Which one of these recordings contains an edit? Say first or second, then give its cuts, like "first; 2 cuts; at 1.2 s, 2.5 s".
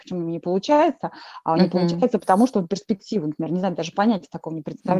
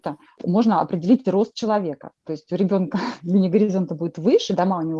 first; 1 cut; at 2.2 s